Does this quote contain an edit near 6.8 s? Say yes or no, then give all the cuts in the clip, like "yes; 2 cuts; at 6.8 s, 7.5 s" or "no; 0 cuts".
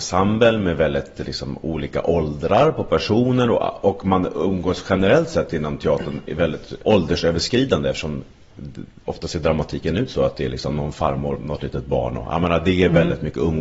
yes; 2 cuts; at 6.8 s, 11.3 s